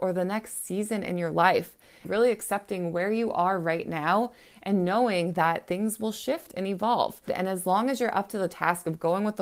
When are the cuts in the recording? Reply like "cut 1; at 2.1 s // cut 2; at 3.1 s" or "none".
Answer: cut 1; at 2.0 s // cut 2; at 7.3 s